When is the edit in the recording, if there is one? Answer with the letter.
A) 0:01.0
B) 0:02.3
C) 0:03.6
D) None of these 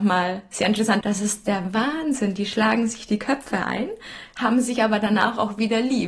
A